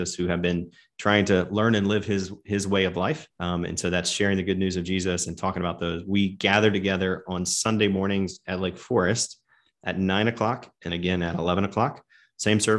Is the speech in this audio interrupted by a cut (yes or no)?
yes